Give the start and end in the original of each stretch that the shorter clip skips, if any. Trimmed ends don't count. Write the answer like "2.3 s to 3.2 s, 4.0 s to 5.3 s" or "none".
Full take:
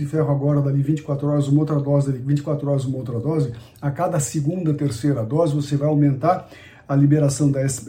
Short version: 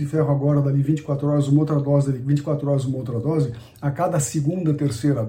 none